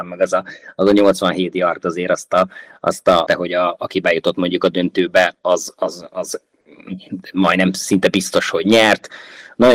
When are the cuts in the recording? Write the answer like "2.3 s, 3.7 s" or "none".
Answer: 3.3 s

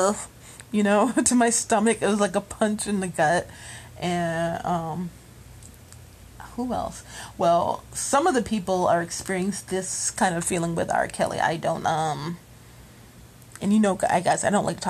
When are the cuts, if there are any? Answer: none

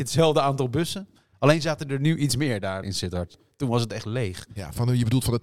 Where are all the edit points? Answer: 2.8 s

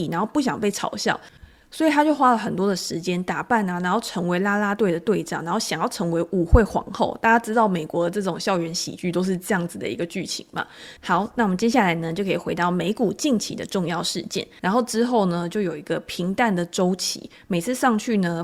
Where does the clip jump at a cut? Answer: 11.0 s, 14.6 s

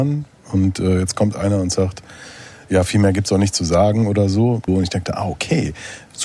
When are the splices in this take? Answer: 4.7 s

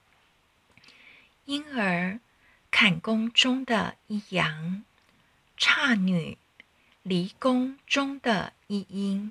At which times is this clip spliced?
none

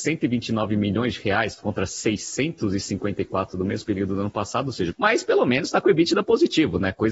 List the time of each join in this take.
4.9 s

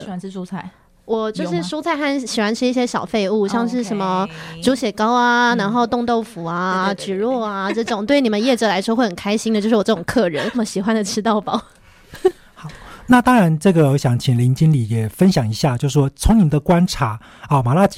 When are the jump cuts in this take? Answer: 10.5 s

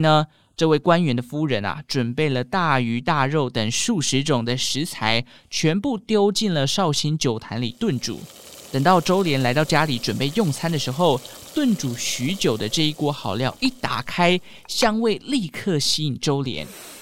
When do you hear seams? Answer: none

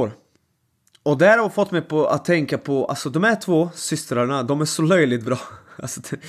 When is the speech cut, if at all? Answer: none

